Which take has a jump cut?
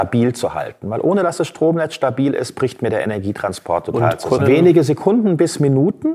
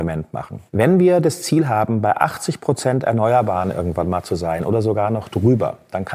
first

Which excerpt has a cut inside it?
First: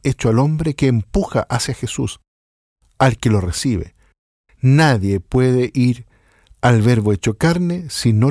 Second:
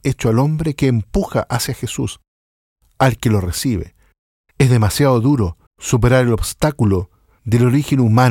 second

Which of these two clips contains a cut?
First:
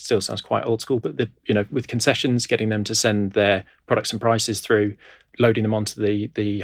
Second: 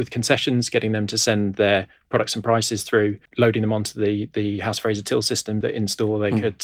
second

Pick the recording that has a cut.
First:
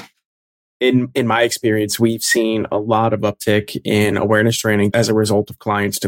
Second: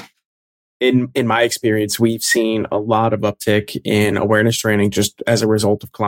first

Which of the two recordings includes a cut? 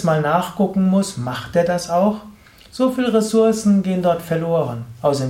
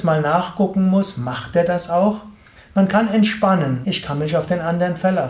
second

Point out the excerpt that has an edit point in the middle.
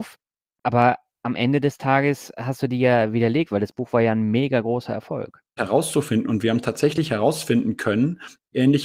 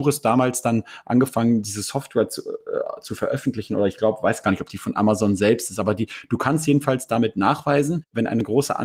first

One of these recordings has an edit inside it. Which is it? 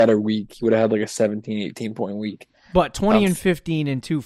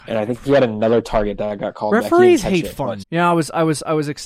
second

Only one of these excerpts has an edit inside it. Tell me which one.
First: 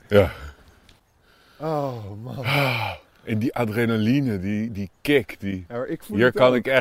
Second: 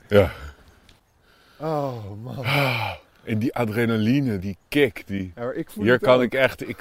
second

